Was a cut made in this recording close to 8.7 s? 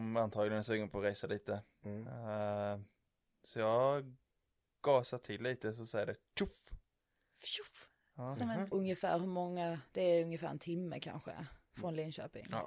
yes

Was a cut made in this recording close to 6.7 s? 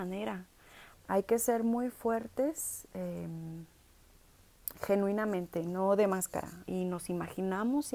yes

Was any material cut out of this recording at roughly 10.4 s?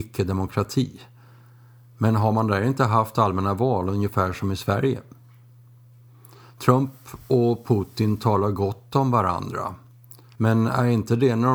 yes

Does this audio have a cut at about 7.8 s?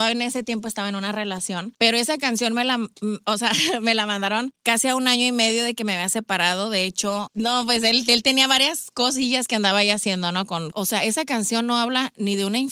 no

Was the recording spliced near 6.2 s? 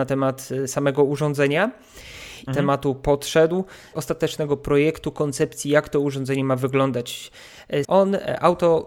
no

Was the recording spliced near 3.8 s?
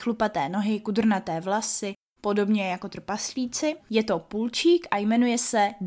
yes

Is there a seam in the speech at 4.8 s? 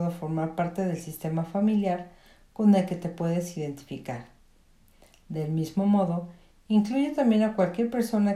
no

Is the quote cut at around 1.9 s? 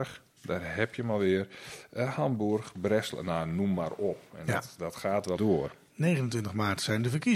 no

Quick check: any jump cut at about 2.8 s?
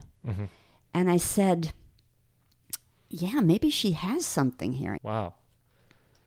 no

